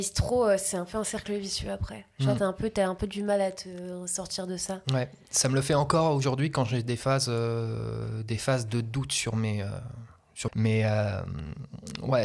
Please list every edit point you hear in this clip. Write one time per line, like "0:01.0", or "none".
0:10.5